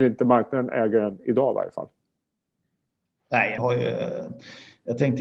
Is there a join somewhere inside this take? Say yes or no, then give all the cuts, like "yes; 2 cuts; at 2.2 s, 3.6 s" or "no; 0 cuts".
yes; 1 cut; at 3.6 s